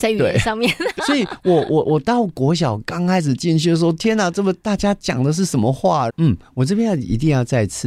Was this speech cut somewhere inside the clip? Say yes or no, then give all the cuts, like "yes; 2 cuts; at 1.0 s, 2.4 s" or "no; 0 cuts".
yes; 2 cuts; at 1.0 s, 6.1 s